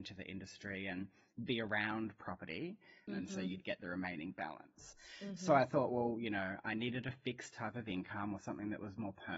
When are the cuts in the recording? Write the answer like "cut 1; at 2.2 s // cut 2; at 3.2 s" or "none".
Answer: cut 1; at 3.1 s